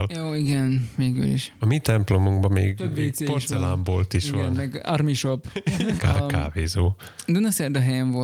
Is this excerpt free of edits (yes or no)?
no